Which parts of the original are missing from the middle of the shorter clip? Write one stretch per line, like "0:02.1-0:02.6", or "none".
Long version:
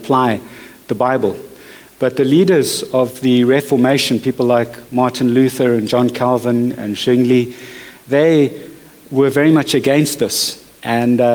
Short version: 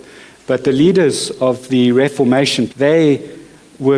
0:04.2-0:08.0

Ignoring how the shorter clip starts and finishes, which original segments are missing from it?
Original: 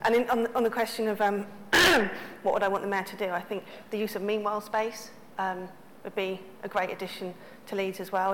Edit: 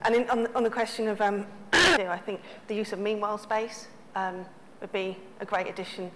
0:02.0-0:03.2

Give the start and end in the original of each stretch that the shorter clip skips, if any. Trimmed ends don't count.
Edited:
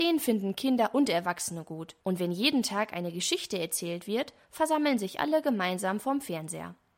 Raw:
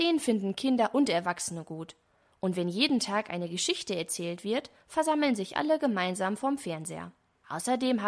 0:02.0-0:02.4

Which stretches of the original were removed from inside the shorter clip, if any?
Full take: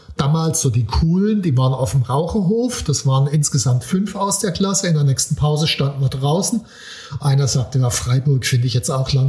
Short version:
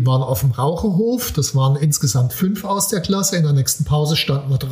none

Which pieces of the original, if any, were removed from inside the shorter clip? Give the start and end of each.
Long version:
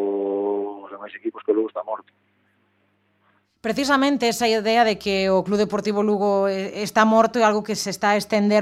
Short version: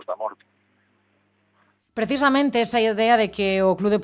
none

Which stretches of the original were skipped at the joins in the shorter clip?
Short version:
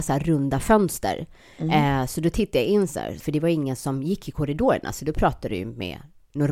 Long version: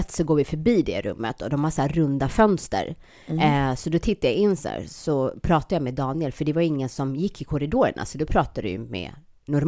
0:04.9-0:06.3

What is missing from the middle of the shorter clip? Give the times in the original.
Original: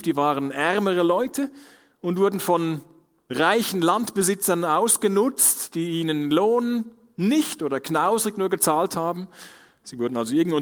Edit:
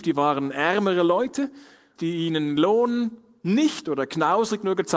0:02.0-0:05.7

